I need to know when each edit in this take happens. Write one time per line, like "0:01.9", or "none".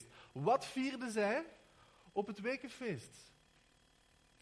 none